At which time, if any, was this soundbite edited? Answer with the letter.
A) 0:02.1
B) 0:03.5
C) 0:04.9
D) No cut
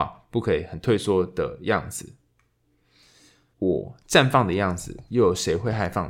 B